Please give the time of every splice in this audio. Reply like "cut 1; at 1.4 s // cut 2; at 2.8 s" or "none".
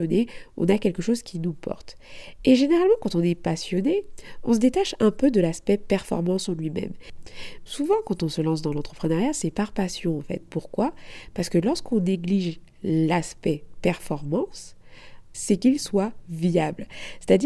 cut 1; at 7.7 s // cut 2; at 10.4 s // cut 3; at 15.3 s